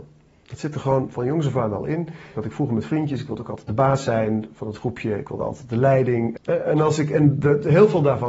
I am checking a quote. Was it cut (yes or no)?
yes